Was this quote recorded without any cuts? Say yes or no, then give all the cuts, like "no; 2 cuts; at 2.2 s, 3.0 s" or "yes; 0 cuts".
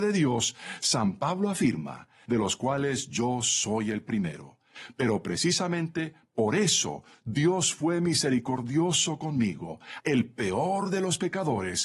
no; 2 cuts; at 2.2 s, 10.0 s